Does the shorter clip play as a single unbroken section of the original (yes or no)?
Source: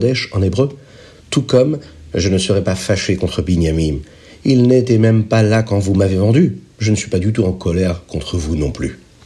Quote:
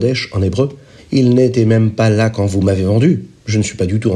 no